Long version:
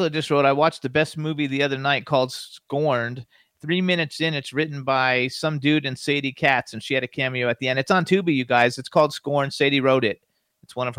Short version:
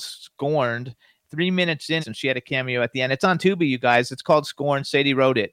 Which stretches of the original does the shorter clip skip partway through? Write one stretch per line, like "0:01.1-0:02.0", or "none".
0:04.3-0:06.7